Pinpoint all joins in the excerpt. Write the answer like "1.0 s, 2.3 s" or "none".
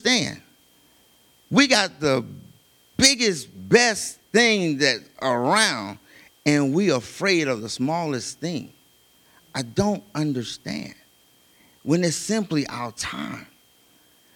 none